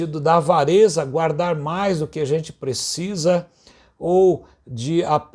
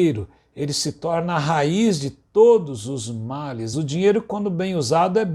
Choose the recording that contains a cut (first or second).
second